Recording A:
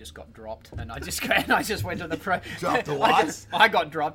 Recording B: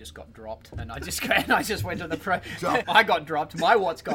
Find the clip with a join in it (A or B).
B